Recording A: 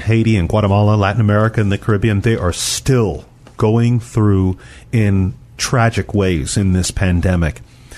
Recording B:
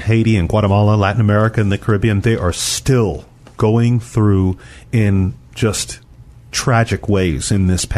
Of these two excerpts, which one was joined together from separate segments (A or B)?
A